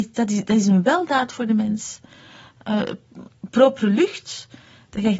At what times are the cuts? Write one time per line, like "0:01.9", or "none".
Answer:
none